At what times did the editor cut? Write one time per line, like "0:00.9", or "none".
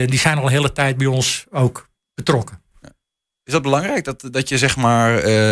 none